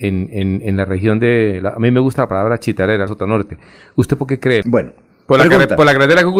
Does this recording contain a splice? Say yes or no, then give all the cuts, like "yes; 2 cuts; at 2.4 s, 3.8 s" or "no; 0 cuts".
yes; 2 cuts; at 3.1 s, 4.6 s